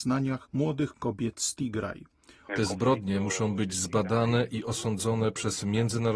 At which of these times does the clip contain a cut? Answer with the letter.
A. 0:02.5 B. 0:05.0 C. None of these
A